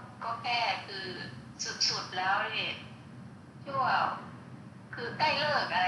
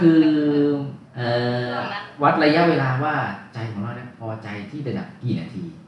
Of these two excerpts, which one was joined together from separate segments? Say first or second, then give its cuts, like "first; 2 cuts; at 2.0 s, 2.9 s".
second; 1 cut; at 1.1 s